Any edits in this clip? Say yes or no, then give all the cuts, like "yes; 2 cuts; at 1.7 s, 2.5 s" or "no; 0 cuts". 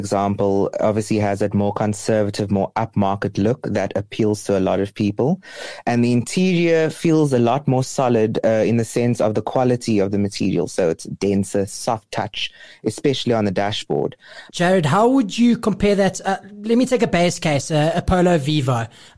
yes; 2 cuts; at 11.7 s, 14.5 s